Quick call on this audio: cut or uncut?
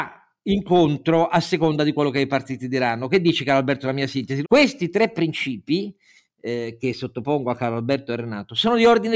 cut